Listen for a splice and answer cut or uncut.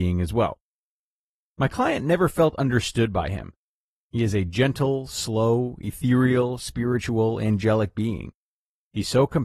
uncut